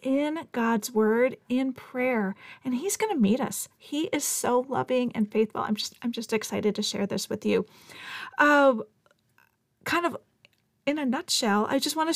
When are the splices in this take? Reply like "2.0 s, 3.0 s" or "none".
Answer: none